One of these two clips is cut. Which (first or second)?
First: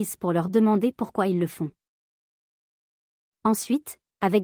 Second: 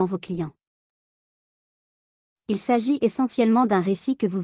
first